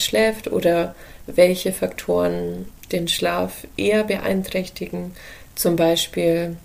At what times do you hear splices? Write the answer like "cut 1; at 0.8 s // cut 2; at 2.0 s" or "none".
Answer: none